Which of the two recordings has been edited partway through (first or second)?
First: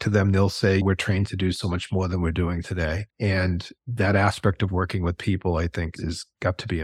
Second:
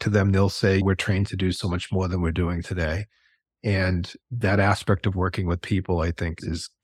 first